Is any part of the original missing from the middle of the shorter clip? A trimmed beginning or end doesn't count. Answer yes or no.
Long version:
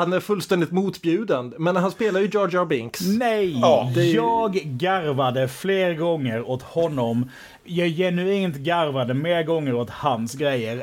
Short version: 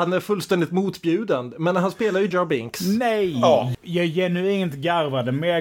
yes